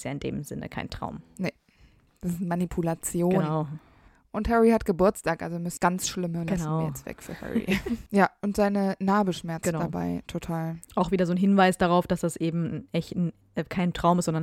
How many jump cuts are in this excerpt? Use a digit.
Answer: 1